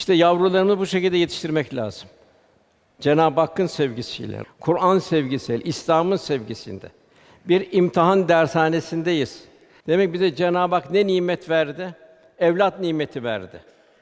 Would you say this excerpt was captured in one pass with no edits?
no; 2 cuts; at 4.4 s, 9.8 s

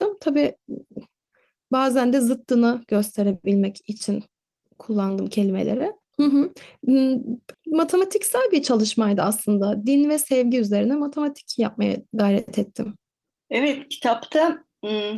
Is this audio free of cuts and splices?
no; 2 cuts; at 6.1 s, 7.5 s

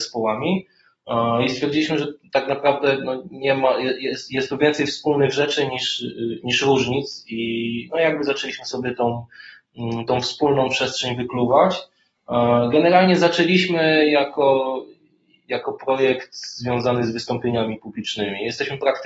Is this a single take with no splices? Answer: yes; 0 cuts

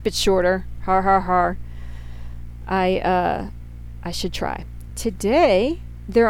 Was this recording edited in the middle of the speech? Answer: yes; 1 cut; at 4.9 s

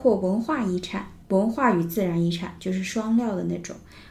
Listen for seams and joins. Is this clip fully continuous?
no; 1 cut; at 1.2 s

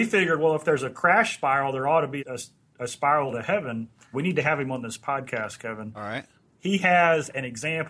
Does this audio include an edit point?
yes; 2 cuts; at 2.2 s, 4.1 s

